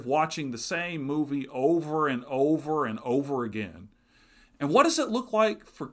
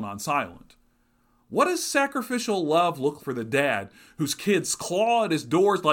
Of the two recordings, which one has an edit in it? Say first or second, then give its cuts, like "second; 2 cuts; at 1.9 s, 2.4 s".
second; 2 cuts; at 1.4 s, 3.2 s